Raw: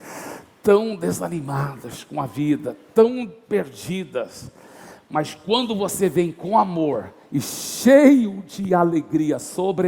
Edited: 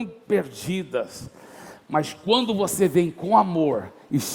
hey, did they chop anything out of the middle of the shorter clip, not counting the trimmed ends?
no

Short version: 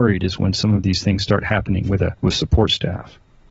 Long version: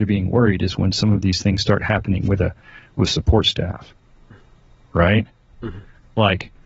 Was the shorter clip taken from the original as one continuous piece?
no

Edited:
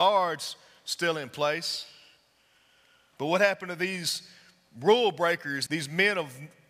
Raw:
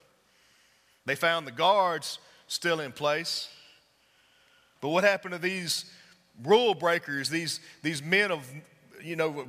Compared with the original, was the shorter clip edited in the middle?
yes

